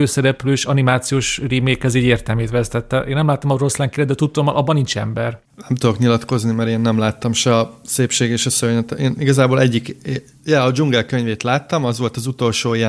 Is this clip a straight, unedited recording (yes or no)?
yes